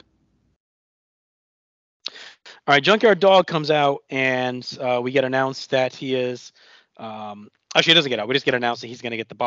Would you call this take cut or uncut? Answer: uncut